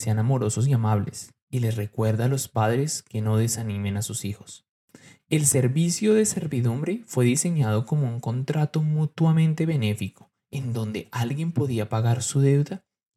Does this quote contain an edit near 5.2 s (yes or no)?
yes